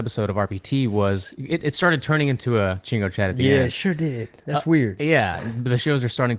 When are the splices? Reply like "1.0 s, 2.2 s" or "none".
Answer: none